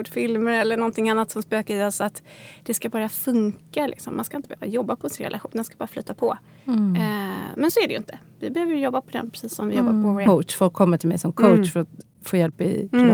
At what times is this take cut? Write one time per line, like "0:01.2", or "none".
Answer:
0:10.3